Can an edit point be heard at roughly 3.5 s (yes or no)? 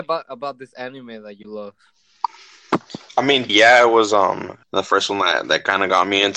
yes